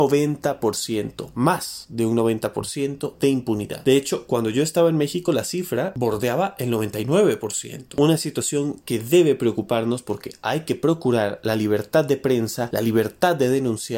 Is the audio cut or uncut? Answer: uncut